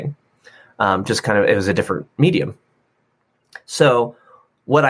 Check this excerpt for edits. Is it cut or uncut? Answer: uncut